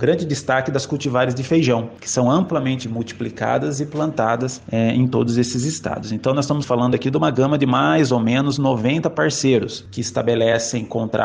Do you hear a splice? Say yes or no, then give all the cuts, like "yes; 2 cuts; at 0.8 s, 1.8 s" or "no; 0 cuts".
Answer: no; 0 cuts